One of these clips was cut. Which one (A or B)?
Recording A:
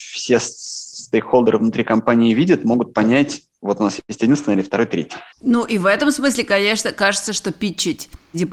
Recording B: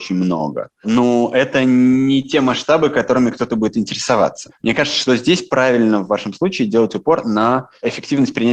A